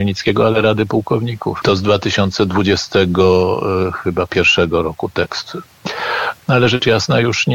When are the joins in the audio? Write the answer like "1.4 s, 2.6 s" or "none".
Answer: 1.6 s, 6.4 s

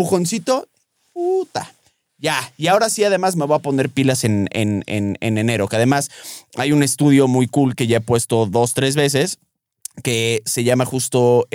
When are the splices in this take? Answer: none

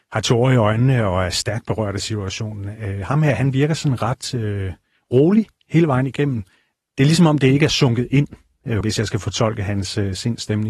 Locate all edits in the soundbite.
8.8 s

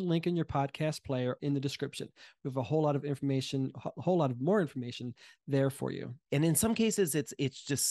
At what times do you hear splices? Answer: 1.4 s, 6.3 s

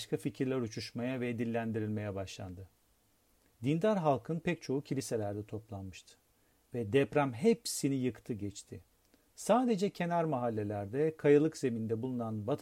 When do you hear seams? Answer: 3.5 s

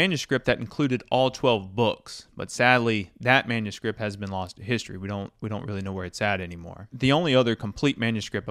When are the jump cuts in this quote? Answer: none

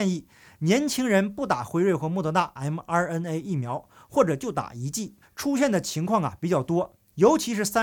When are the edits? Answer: 5.2 s

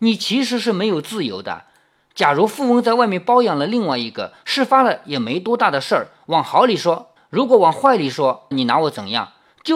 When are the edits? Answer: 7.2 s, 8.5 s

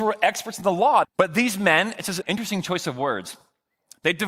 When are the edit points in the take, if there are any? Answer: 1.0 s, 2.2 s

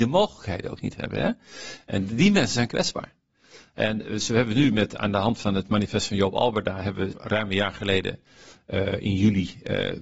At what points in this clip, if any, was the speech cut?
7.1 s

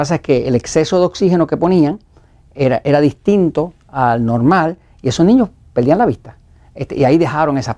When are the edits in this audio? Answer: none

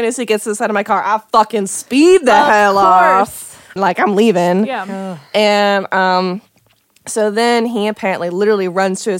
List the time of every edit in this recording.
3.8 s

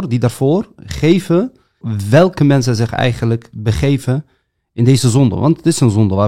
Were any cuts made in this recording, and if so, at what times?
1.8 s

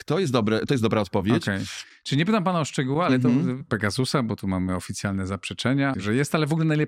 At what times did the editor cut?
3.6 s, 5.9 s

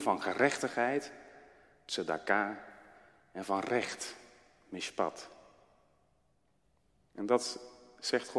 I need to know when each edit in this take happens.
none

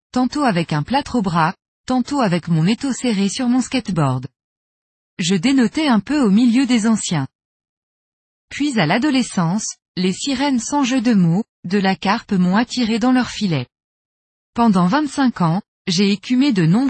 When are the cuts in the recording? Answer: none

